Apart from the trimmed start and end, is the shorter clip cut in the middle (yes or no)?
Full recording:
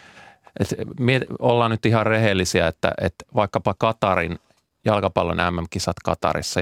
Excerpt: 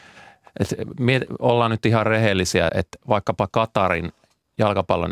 yes